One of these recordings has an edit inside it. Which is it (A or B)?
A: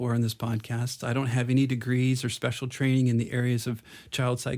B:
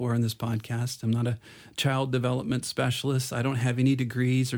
A